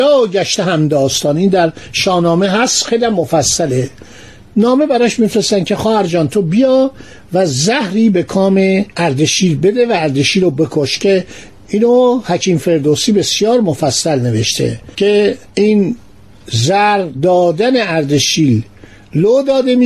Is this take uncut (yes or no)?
no